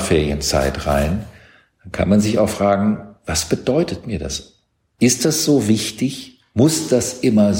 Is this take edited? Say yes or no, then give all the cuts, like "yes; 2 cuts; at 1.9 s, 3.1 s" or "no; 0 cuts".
no; 0 cuts